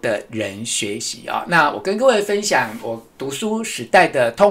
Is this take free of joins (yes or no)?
yes